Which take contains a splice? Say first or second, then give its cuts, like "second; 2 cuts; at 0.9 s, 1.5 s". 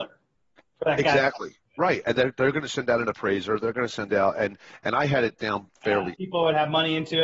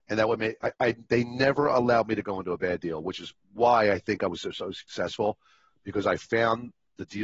first; 1 cut; at 6.1 s